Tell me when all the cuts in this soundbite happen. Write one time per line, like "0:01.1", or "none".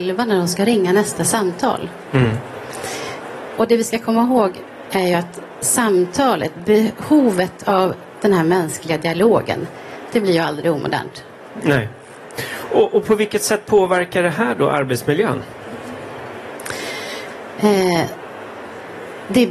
0:03.6